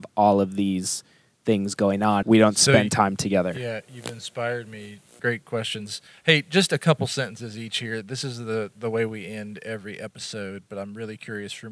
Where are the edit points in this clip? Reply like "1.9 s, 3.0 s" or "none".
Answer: 2.2 s, 5.2 s